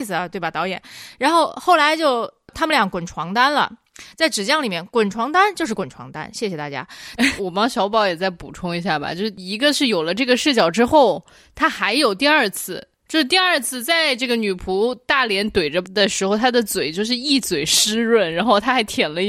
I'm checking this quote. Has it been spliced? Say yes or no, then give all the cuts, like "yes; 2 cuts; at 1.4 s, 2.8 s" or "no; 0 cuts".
yes; 1 cut; at 7.2 s